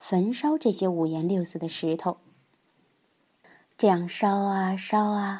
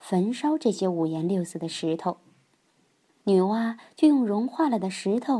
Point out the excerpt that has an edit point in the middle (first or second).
second